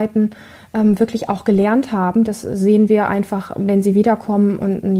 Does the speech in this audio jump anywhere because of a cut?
no; 0 cuts

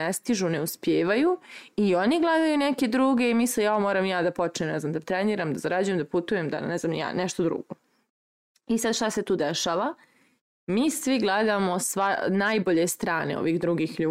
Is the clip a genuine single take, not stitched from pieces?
yes; 0 cuts

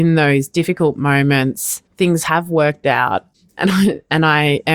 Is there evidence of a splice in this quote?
yes; 1 cut; at 1.9 s

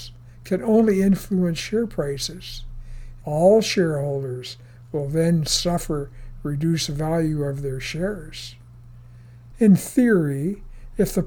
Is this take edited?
yes; 2 cuts; at 3.2 s, 9.5 s

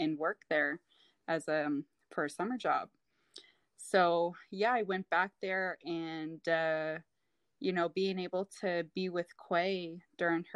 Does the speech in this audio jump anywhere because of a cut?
no; 0 cuts

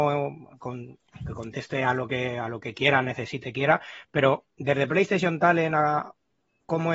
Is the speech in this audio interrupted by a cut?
no; 0 cuts

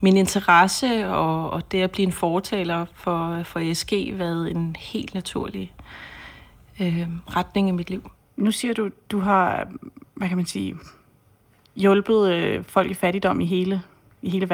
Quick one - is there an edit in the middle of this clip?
no; 0 cuts

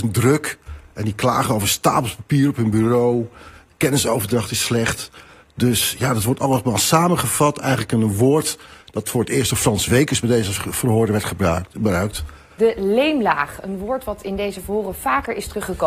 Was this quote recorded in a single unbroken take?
no; 1 cut; at 12.6 s

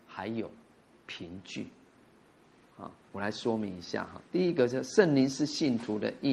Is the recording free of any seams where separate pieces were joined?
no; 2 cuts; at 3.0 s, 4.3 s

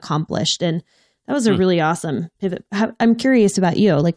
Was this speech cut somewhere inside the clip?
no; 0 cuts

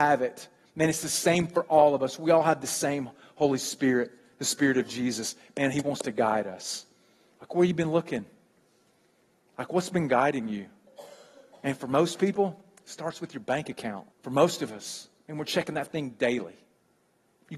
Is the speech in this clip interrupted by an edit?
yes; 1 cut; at 14.1 s

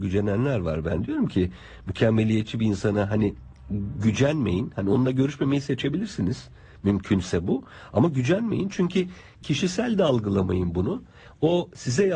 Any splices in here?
no; 0 cuts

